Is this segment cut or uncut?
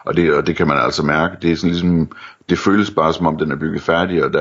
uncut